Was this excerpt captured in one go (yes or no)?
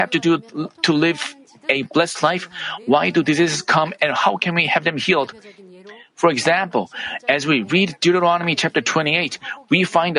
yes